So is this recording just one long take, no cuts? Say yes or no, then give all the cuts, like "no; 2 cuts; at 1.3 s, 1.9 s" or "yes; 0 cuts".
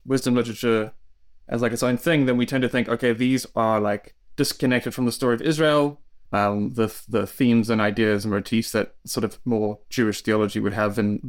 no; 1 cut; at 6.3 s